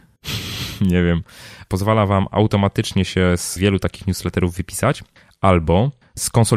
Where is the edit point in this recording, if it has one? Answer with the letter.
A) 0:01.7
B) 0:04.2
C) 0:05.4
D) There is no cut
A